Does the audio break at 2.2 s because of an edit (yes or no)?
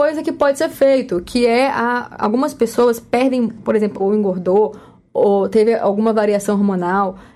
no